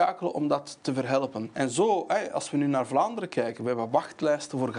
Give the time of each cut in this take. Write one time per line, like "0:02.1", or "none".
0:01.5